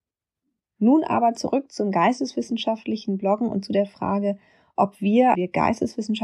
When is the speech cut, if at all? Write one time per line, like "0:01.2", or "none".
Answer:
0:05.3

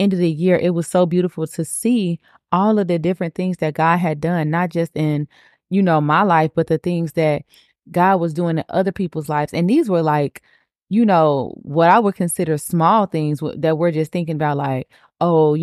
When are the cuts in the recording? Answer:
none

